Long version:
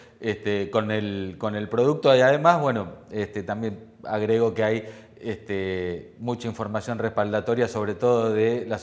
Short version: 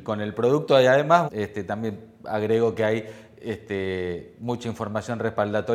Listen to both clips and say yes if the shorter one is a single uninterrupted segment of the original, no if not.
no